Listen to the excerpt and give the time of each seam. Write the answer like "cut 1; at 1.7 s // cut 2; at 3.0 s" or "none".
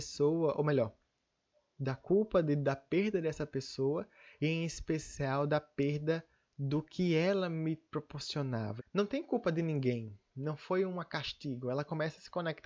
cut 1; at 8.8 s